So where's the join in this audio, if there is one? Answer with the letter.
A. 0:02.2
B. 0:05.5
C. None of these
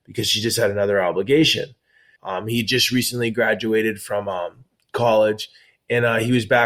A